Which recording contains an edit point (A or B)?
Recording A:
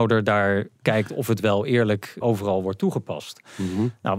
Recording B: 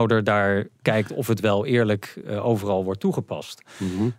A